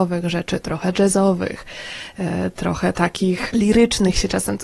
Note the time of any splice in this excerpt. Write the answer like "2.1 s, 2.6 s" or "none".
3.5 s